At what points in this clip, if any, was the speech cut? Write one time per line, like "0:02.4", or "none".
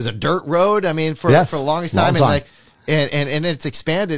none